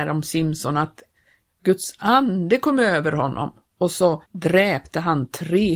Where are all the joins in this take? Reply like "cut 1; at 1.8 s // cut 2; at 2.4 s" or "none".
cut 1; at 4.3 s